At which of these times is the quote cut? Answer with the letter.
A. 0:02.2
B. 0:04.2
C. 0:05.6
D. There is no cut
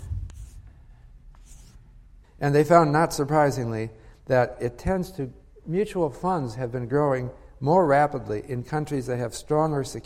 A